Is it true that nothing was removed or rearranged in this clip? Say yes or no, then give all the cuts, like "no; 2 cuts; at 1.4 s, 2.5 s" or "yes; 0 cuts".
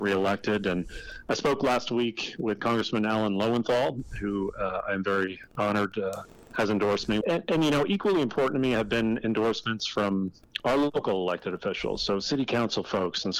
no; 1 cut; at 7.2 s